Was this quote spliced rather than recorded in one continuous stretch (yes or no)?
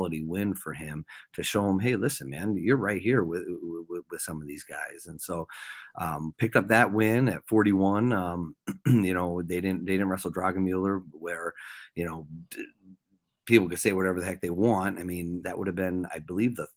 yes